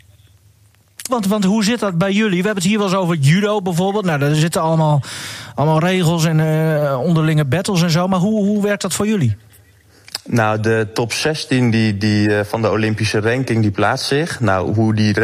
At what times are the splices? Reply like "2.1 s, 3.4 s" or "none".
1.1 s